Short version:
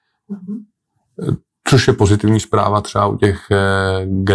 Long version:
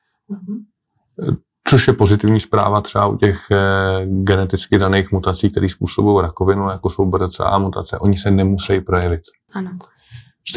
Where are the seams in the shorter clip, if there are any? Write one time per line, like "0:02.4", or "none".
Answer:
none

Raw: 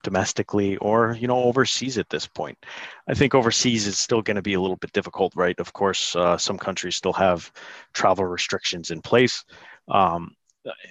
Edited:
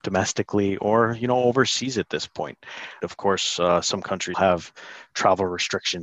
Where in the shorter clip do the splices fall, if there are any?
0:03.0
0:04.3

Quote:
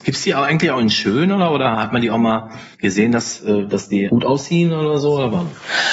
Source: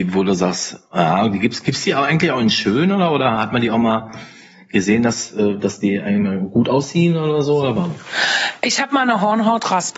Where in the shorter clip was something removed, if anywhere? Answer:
0:02.7
0:04.1

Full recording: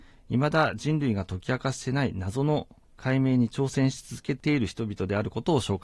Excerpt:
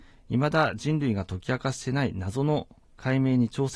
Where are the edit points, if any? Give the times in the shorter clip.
none

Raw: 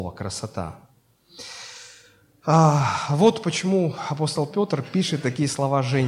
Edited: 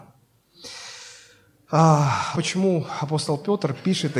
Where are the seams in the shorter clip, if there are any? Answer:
0:02.3

